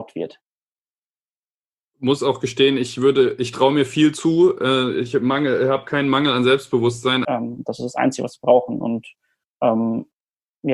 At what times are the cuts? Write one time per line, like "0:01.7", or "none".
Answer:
0:07.2